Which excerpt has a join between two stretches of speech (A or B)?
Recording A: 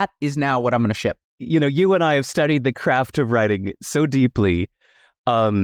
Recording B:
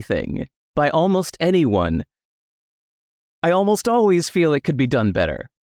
A